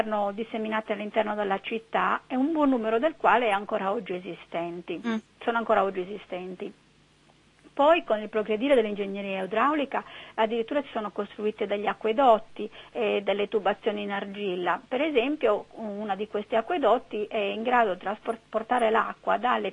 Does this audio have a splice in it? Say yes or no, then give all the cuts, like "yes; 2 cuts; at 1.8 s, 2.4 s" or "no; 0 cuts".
no; 0 cuts